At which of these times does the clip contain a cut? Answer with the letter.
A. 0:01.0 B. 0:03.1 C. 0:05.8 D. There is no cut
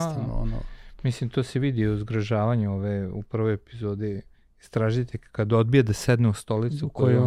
D